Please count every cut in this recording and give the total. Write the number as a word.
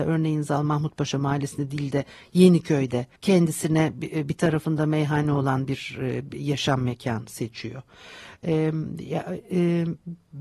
one